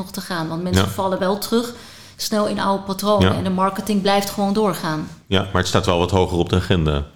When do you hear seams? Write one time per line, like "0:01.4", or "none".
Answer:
none